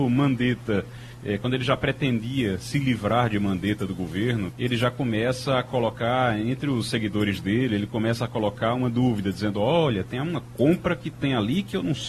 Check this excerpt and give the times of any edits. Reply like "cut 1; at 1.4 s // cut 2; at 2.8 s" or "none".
cut 1; at 4.5 s